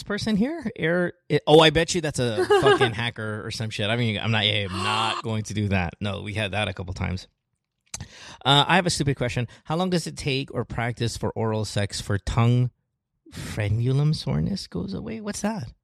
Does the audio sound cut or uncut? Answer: uncut